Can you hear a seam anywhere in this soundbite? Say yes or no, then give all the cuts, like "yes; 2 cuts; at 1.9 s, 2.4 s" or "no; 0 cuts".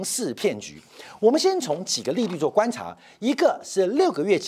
no; 0 cuts